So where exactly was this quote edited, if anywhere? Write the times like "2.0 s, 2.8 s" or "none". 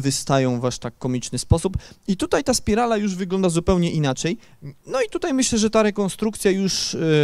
2.0 s, 4.8 s